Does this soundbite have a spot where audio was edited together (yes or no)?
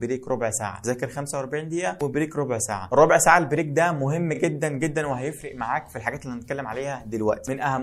no